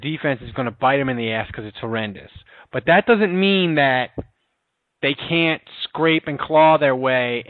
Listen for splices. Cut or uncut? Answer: uncut